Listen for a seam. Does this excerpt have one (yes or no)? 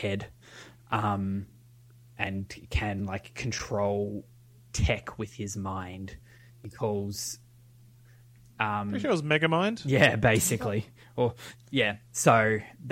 no